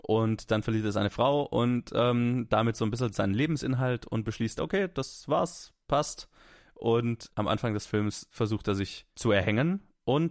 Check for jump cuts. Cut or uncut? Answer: cut